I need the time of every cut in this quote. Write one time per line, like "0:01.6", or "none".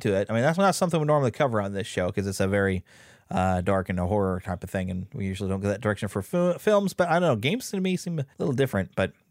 0:08.3